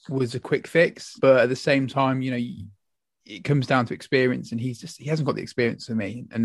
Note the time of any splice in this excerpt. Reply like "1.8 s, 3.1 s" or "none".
1.2 s